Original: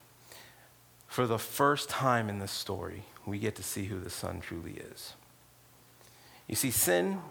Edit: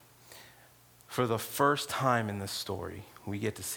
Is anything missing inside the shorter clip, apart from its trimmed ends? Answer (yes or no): no